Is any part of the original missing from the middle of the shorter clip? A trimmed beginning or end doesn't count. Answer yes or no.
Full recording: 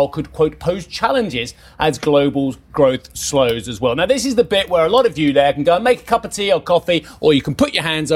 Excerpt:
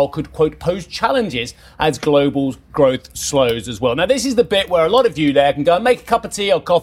no